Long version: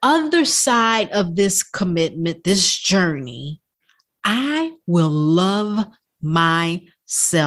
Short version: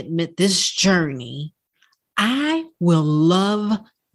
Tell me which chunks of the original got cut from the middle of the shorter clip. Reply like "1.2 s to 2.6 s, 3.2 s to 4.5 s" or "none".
none